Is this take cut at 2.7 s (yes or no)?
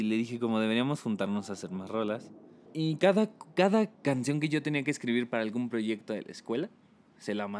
yes